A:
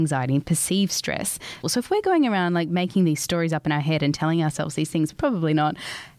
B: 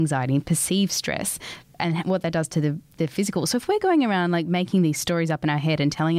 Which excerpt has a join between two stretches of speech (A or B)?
A